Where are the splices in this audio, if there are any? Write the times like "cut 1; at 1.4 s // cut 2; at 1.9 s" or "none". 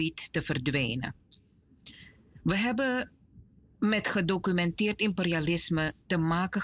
none

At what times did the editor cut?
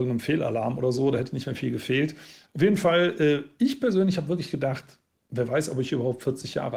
none

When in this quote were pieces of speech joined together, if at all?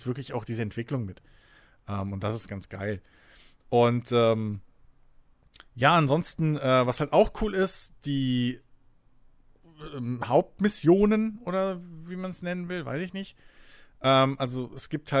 none

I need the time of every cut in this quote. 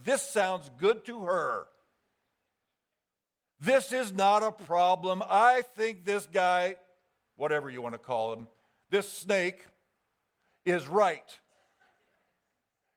none

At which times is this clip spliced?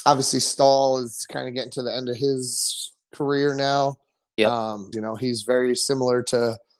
cut 1; at 4.9 s

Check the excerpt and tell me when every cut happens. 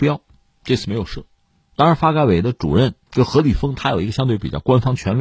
none

